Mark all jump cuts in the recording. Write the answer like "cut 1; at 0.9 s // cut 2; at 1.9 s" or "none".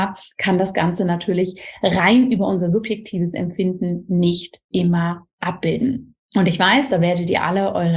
cut 1; at 6.2 s